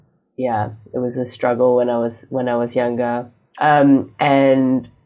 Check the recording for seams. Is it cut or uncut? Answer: cut